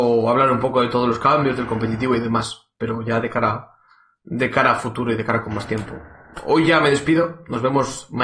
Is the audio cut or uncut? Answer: uncut